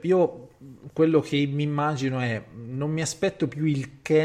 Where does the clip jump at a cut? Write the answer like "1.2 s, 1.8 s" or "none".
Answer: none